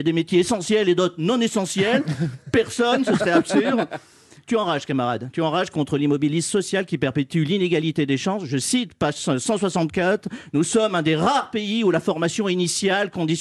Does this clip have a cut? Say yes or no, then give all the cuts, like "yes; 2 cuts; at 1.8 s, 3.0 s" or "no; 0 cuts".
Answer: no; 0 cuts